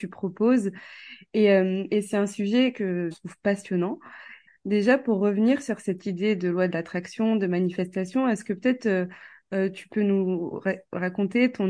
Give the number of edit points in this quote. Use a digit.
2